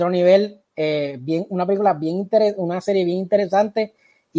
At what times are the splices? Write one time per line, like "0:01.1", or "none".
none